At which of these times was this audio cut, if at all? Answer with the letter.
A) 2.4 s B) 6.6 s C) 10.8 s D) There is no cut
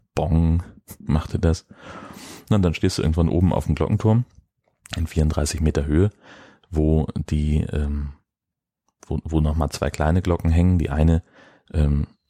D